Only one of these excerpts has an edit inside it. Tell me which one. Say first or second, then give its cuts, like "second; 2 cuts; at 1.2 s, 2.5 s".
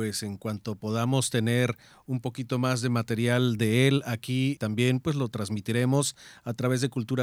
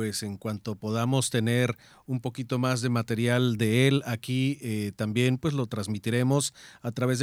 first; 1 cut; at 4.6 s